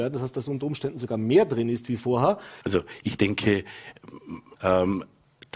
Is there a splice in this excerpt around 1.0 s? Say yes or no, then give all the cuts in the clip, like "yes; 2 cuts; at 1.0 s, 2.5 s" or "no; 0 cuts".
no; 2 cuts; at 2.6 s, 4.6 s